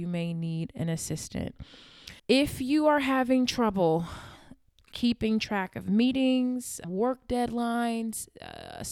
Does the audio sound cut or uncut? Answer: cut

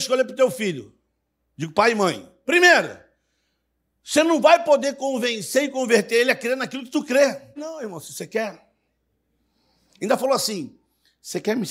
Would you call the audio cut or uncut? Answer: cut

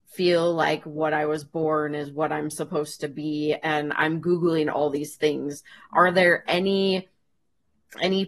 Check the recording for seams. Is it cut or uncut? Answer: uncut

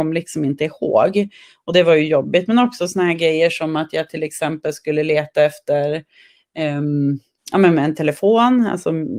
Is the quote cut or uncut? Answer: uncut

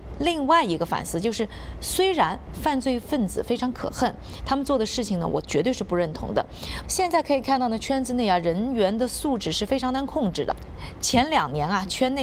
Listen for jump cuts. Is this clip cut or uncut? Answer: cut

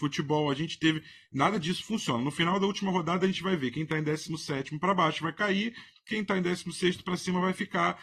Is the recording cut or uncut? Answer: uncut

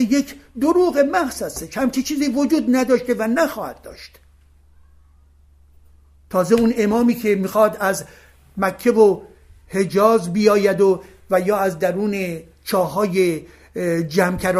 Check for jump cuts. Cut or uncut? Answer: uncut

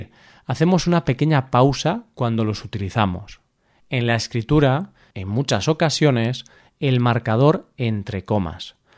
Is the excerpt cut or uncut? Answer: cut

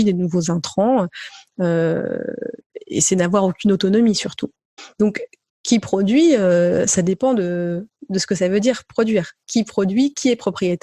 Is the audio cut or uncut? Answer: uncut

